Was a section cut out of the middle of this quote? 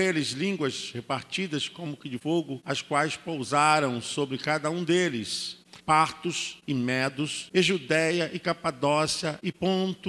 yes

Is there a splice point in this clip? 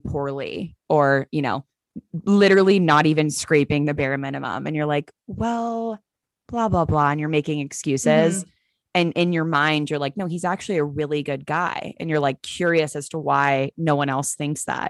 no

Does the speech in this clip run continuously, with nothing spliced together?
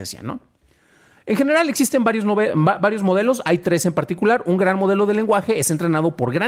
yes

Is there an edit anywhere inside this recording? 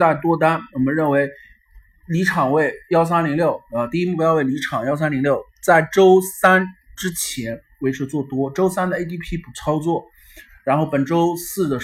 no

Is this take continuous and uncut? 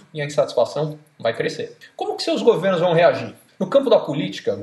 no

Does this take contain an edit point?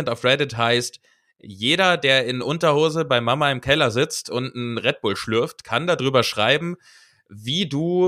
no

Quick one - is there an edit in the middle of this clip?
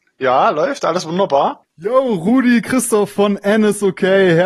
yes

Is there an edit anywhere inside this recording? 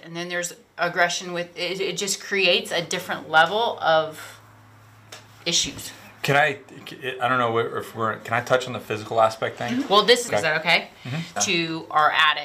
yes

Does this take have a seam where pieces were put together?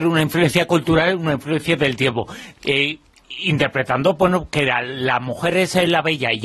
yes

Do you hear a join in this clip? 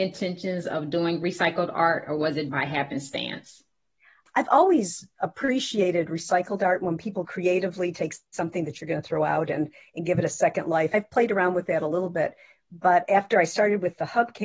no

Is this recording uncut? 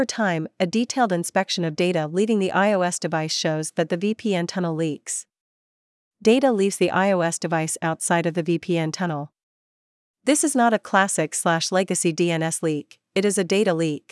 yes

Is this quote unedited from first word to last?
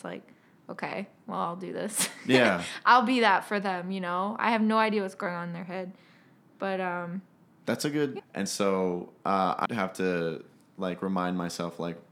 no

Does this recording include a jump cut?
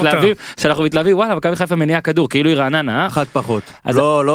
yes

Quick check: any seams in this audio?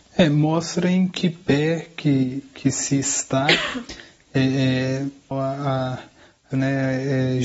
yes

